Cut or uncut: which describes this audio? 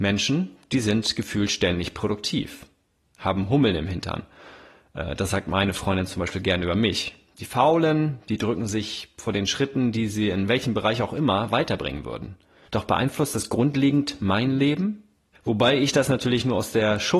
cut